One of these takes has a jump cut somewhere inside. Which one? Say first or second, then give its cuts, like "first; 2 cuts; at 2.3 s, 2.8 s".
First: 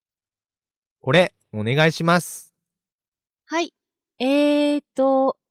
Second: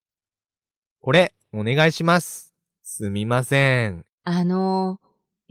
second; 2 cuts; at 2.8 s, 4.1 s